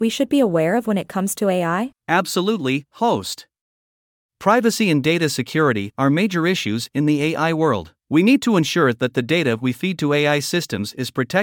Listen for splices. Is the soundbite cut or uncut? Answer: cut